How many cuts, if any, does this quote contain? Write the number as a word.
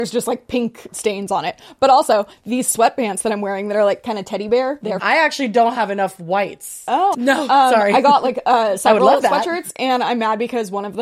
two